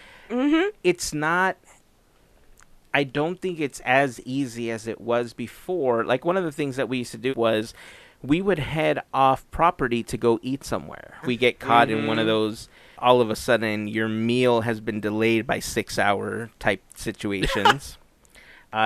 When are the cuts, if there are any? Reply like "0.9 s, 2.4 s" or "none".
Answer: 7.3 s, 11.2 s, 12.9 s